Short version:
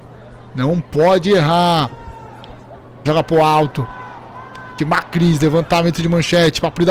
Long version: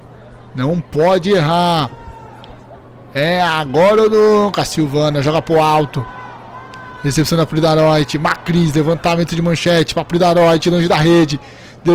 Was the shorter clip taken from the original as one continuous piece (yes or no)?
no